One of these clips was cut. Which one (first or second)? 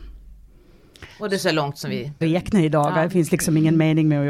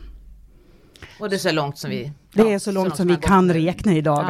first